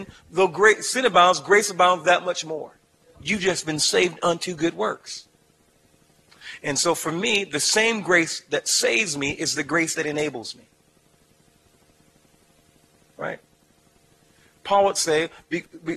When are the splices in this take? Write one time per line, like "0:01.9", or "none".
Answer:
0:03.1